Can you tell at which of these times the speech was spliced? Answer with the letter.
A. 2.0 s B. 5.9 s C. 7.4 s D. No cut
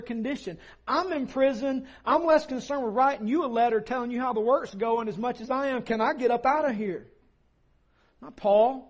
D